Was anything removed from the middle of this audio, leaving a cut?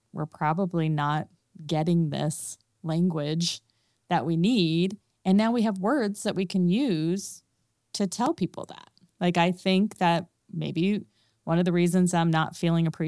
no; 0 cuts

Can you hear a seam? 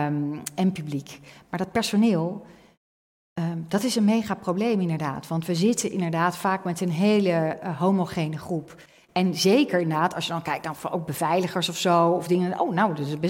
no; 0 cuts

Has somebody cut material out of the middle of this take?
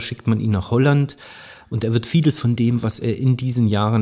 yes; 1 cut; at 1.6 s

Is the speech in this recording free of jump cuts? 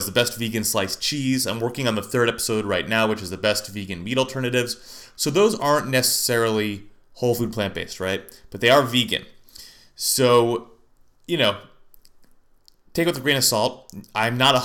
yes; 0 cuts

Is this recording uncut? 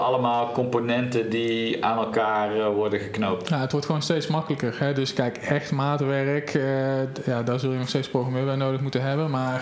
yes; 0 cuts

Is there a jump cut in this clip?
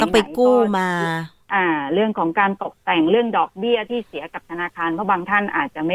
no; 0 cuts

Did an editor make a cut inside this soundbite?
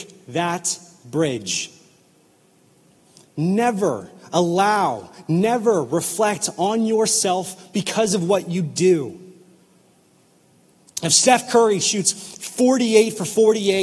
no; 0 cuts

